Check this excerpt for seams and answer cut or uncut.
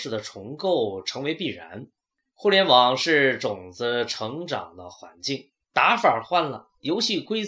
cut